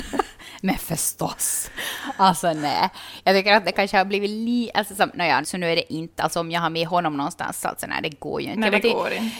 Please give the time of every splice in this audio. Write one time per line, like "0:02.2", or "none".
0:05.4